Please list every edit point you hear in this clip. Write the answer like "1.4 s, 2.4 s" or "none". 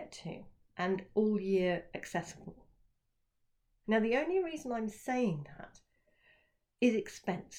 3.8 s